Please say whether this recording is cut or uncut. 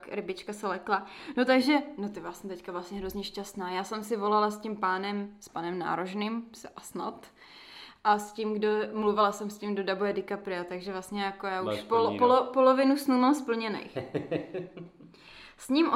uncut